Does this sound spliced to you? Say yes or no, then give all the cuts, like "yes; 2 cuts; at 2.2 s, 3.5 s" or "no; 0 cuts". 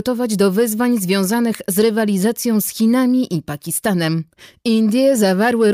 no; 0 cuts